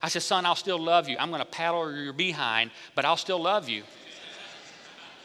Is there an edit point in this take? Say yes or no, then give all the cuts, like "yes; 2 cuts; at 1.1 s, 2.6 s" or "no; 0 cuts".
no; 0 cuts